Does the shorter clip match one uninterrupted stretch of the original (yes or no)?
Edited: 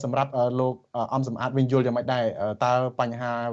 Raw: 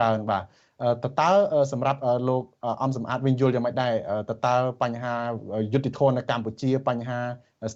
no